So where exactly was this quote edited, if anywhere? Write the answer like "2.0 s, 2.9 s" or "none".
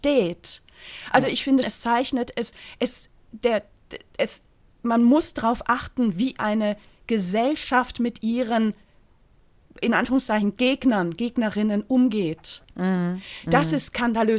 1.6 s, 12.7 s